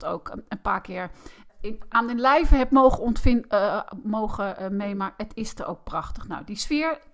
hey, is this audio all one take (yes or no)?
no